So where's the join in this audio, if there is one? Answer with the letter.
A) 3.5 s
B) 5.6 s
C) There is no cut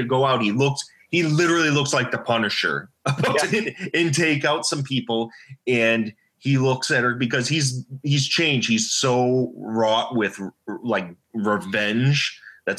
A